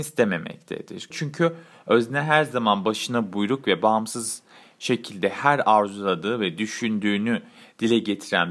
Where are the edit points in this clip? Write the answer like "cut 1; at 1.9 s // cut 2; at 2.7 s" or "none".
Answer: cut 1; at 1.1 s